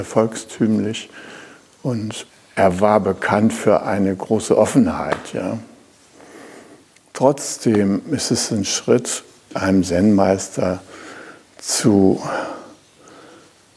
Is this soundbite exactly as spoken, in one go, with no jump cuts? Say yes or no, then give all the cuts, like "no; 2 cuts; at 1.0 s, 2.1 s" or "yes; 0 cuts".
yes; 0 cuts